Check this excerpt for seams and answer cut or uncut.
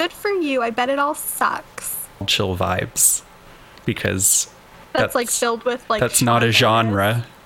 uncut